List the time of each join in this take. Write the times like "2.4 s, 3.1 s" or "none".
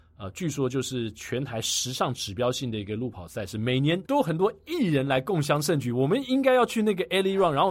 none